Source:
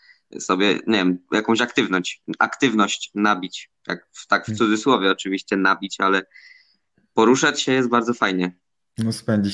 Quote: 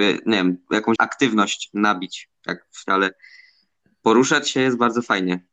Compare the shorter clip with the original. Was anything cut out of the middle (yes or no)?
yes